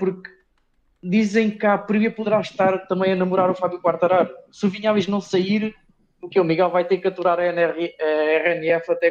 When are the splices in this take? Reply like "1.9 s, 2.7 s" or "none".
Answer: none